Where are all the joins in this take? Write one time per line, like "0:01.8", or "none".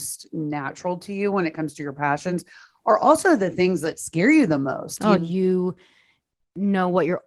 0:05.2